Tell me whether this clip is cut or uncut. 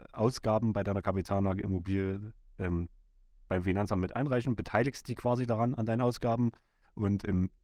uncut